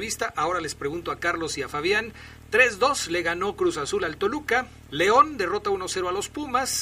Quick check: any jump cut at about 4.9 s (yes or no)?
yes